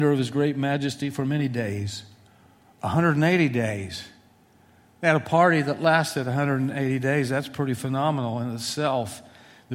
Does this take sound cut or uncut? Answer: uncut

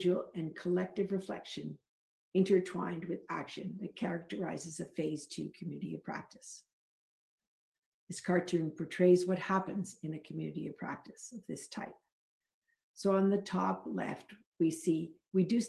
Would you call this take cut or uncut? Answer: uncut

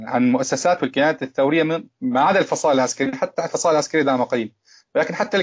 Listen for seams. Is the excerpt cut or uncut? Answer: uncut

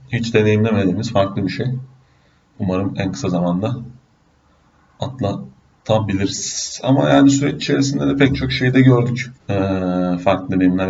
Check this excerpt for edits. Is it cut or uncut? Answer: cut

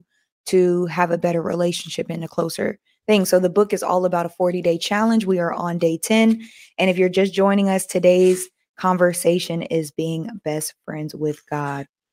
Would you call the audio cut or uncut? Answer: uncut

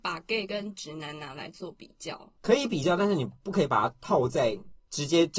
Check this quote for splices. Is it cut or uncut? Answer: uncut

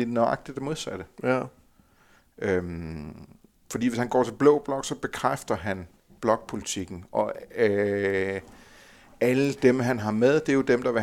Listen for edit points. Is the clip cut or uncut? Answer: uncut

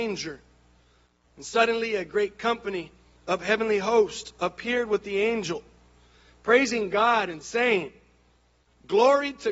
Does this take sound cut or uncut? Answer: uncut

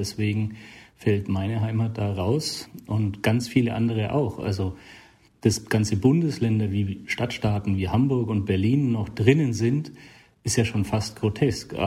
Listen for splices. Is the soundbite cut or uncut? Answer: uncut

